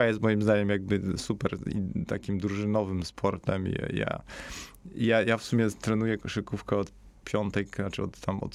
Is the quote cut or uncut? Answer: uncut